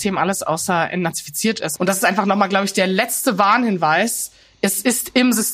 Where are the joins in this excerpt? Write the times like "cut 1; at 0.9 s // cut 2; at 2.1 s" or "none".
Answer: cut 1; at 1.8 s